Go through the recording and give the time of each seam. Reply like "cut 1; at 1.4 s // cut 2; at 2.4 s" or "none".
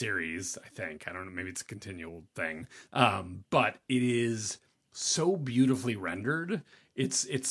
cut 1; at 2.9 s